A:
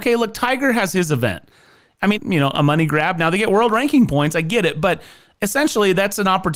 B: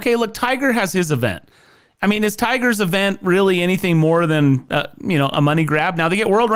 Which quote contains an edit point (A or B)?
A